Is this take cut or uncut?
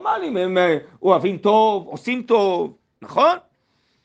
cut